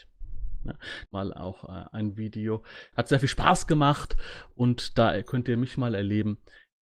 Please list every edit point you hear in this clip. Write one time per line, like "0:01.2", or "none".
0:01.0
0:02.9